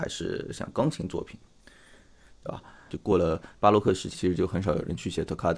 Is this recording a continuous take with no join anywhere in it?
no; 2 cuts; at 2.9 s, 4.1 s

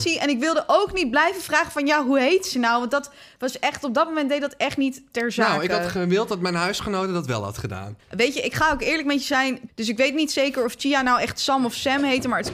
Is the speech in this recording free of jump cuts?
no; 2 cuts; at 8.0 s, 9.7 s

